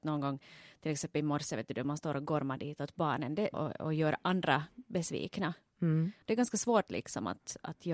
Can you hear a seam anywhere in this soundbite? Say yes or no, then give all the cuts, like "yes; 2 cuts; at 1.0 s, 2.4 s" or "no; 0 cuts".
yes; 2 cuts; at 3.5 s, 6.2 s